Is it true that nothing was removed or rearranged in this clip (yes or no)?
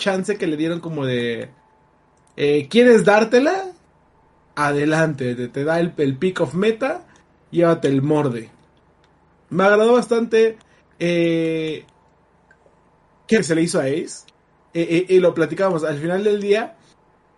no